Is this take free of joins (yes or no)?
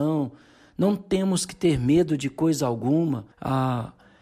no